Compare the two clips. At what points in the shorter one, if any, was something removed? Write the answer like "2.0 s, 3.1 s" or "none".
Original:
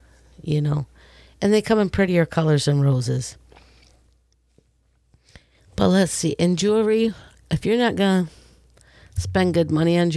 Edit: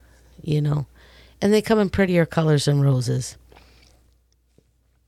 none

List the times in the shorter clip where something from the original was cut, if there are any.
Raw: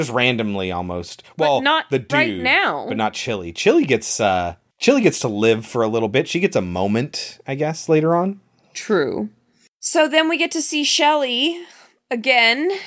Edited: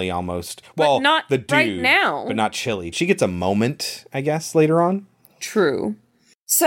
2.9 s

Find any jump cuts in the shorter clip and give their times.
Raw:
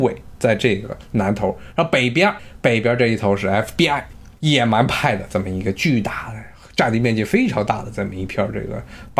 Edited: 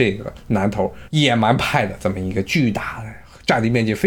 1.1 s

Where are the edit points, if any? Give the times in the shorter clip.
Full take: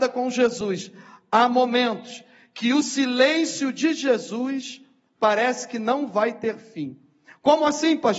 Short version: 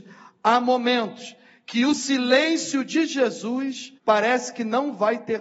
4.0 s

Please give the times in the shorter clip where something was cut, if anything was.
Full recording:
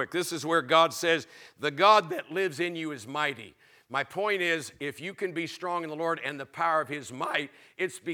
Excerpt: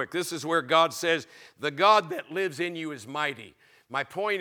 none

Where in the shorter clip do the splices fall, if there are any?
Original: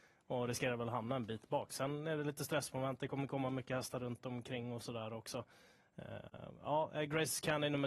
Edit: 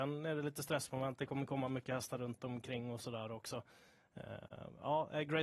none

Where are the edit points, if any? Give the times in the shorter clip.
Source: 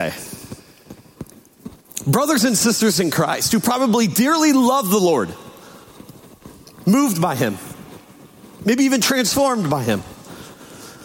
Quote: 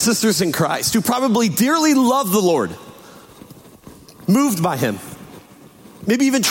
none

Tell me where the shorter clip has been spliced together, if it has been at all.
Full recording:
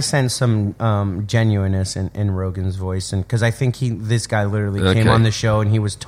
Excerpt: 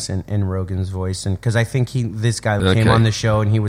2.6 s

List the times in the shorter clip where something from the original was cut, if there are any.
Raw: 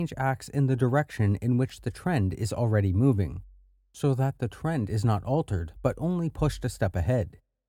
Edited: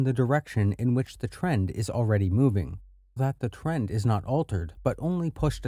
3.2 s

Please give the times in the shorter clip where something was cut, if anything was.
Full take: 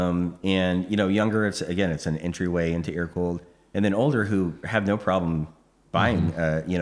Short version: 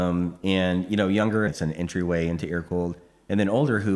1.5 s

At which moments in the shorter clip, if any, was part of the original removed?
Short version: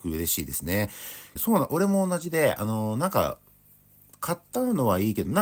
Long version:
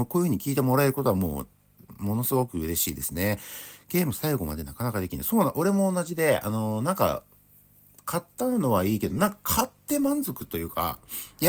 1.4 s

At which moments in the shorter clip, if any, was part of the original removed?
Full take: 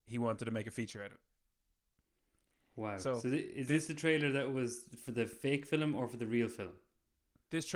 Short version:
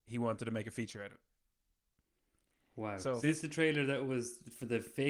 3.2 s

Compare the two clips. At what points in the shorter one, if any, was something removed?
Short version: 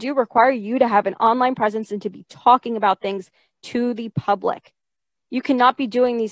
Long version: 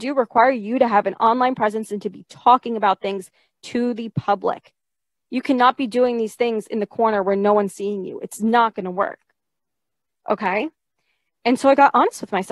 none

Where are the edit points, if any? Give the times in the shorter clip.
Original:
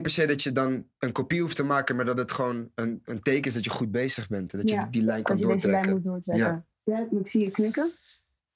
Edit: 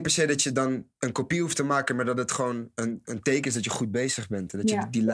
none

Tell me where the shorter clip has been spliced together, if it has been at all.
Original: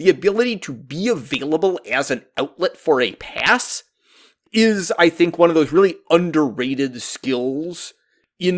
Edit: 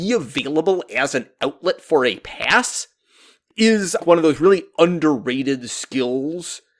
4.0 s

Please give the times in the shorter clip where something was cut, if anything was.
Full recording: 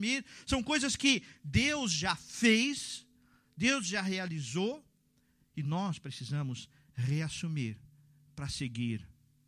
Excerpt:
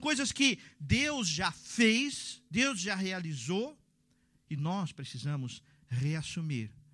2.5 s

